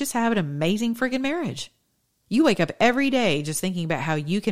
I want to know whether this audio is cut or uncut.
cut